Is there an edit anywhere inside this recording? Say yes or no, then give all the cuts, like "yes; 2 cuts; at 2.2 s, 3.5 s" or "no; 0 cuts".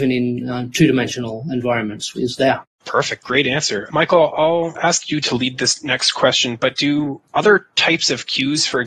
yes; 1 cut; at 2.1 s